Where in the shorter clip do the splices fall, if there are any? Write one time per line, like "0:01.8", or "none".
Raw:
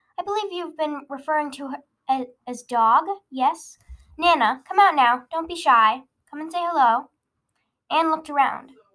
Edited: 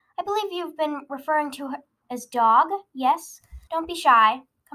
0:02.0
0:03.7